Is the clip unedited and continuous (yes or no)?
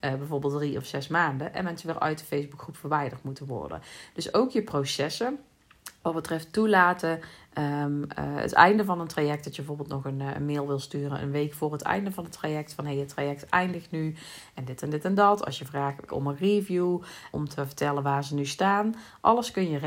no